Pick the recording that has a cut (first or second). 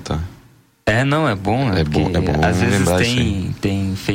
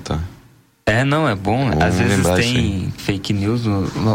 second